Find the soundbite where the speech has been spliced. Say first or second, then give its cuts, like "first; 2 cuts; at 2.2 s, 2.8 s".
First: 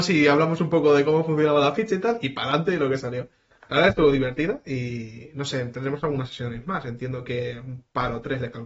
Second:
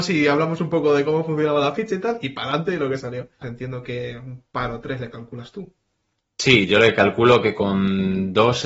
second; 1 cut; at 3.4 s